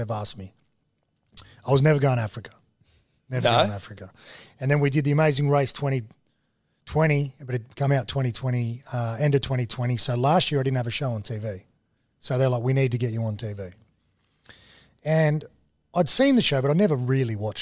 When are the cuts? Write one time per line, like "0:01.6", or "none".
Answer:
none